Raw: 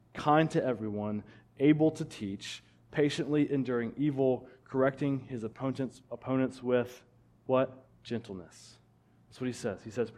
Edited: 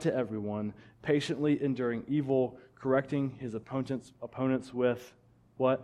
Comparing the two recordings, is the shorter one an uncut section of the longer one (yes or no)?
no